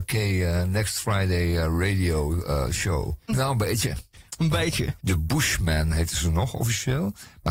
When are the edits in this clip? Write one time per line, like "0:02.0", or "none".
0:03.3
0:05.0